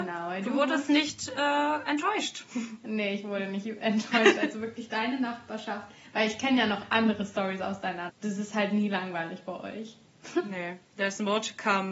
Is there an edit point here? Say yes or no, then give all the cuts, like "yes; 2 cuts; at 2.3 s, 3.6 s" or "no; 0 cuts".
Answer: yes; 1 cut; at 8.1 s